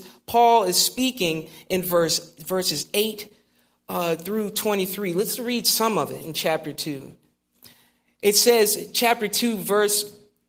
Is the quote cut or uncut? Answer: uncut